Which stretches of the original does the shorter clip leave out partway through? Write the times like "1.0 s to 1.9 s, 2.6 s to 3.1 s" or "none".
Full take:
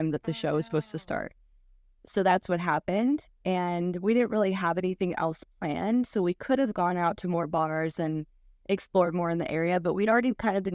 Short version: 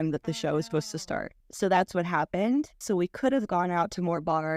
1.4 s to 1.9 s, 3.3 s to 6.1 s

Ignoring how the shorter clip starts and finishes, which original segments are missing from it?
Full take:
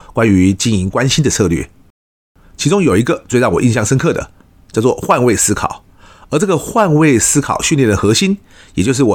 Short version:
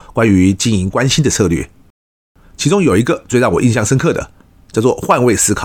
none

